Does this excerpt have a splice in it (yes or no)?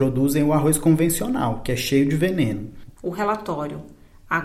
yes